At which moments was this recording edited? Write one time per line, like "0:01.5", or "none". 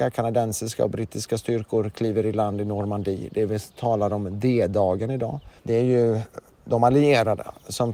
0:05.6